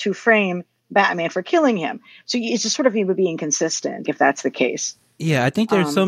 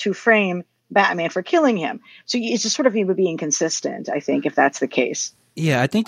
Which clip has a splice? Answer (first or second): first